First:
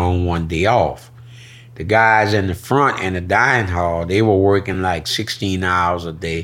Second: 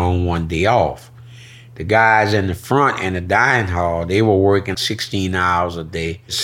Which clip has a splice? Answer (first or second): second